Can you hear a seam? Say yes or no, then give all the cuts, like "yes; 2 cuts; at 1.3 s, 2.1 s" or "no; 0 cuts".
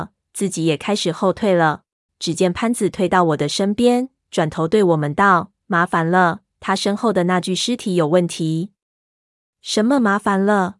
yes; 1 cut; at 2.1 s